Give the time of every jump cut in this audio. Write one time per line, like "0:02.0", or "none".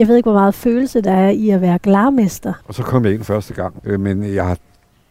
0:02.6
0:03.8